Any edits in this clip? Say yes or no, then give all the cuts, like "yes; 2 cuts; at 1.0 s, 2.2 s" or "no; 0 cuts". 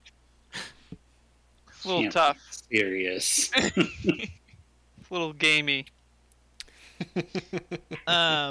no; 0 cuts